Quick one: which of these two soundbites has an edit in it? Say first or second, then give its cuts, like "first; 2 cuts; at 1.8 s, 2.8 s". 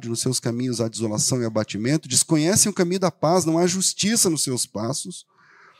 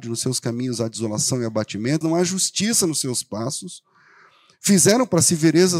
second; 1 cut; at 2.0 s